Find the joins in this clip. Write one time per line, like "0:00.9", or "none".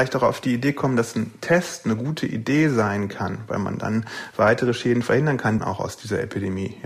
0:05.6